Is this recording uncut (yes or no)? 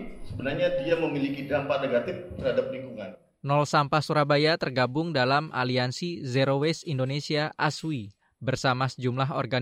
yes